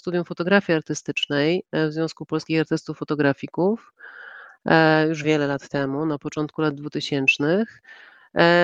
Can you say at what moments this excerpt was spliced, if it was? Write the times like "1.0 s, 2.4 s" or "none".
5.2 s